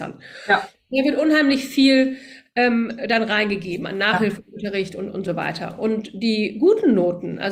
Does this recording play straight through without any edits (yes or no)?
yes